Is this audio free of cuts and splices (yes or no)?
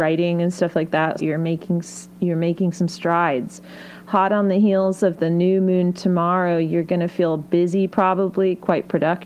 no